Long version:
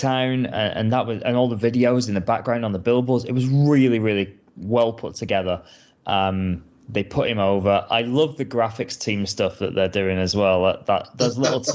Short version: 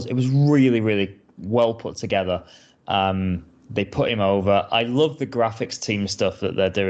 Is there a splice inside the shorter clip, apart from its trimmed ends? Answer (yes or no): no